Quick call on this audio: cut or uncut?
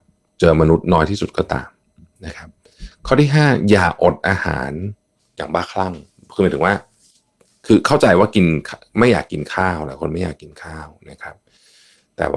uncut